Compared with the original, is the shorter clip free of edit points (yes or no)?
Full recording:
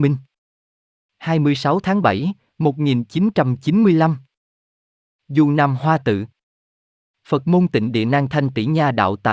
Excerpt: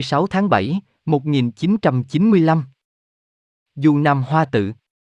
yes